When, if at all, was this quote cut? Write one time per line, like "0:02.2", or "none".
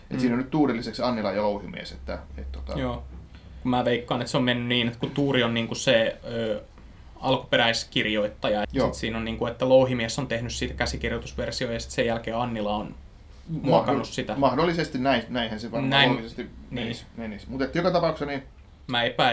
0:08.6